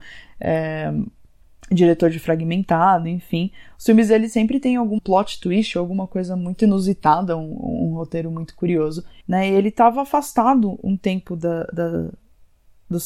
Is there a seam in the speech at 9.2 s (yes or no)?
yes